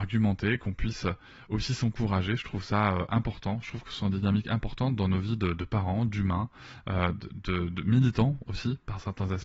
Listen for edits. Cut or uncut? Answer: uncut